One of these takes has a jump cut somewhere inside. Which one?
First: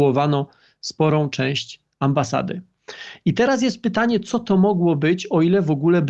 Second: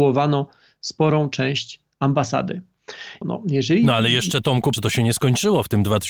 second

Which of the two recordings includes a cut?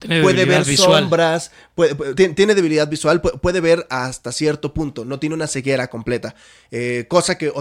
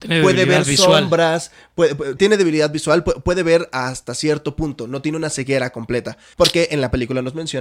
second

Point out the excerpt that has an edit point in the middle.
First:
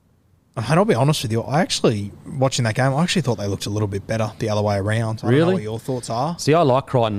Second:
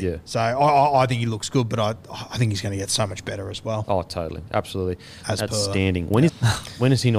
second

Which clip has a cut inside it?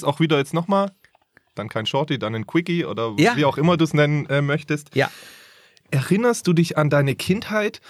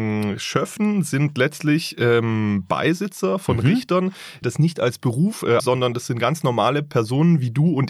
second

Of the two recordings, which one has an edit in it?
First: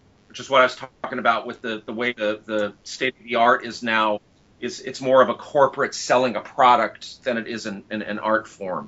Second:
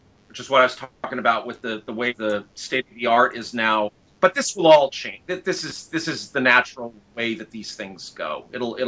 second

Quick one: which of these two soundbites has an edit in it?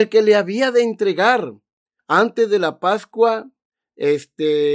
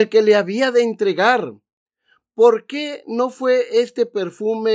first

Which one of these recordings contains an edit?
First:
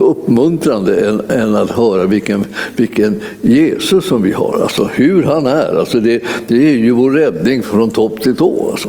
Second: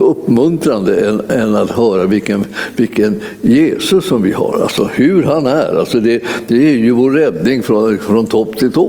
first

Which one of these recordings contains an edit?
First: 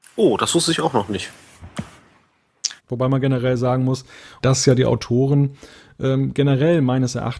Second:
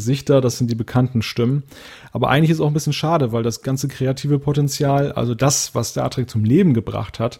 first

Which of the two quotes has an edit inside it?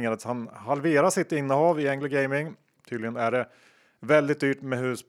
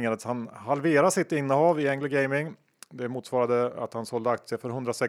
first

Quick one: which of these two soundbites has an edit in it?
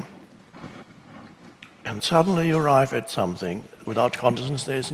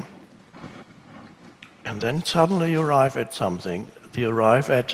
first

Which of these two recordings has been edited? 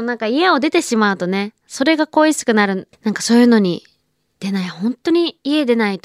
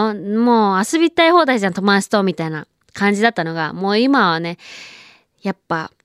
first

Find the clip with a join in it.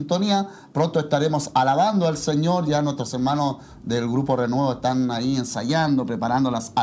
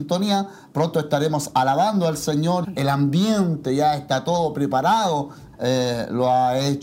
second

